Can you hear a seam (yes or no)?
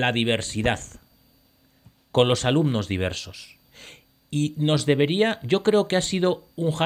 no